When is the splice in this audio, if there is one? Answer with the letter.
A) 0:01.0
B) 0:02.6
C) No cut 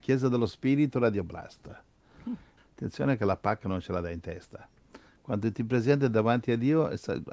B